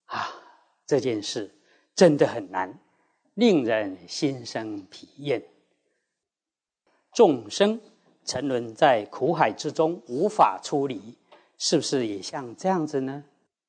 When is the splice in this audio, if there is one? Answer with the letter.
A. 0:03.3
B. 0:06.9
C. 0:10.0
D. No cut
D